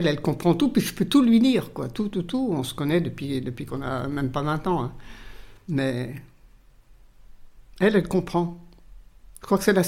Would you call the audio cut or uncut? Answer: cut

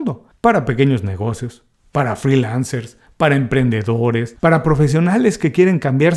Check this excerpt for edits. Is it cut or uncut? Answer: uncut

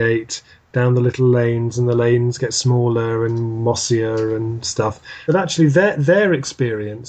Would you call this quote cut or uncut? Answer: cut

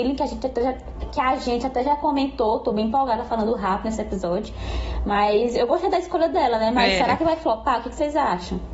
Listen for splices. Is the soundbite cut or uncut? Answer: uncut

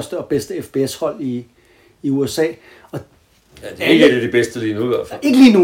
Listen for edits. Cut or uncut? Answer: uncut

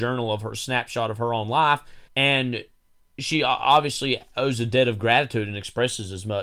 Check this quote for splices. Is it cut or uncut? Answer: cut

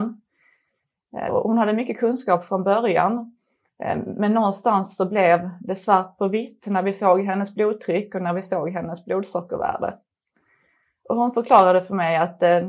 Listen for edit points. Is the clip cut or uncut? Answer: cut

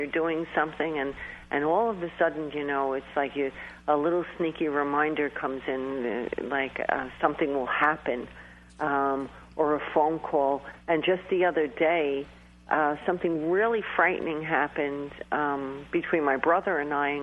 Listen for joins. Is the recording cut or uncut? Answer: uncut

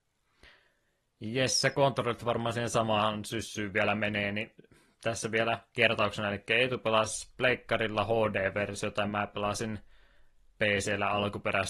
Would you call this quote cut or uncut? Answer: uncut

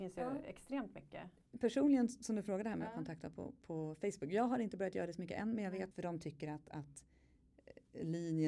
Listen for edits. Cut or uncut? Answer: cut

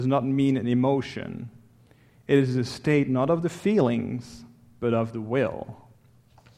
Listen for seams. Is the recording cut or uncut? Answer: uncut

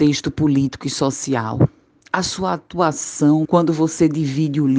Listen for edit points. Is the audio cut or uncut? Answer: cut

